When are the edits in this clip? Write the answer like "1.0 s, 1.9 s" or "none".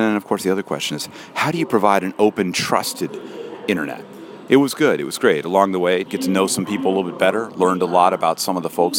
4.5 s, 6.1 s